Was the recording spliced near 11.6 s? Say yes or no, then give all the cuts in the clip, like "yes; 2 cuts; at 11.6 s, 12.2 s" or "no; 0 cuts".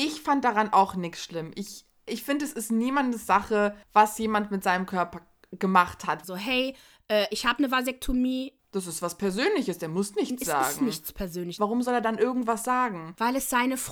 yes; 3 cuts; at 3.8 s, 6.2 s, 11.6 s